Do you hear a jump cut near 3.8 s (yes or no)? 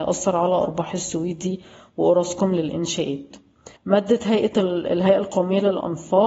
yes